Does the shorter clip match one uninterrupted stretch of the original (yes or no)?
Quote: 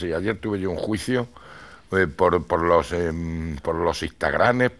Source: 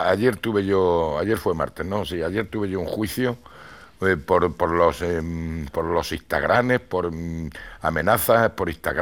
yes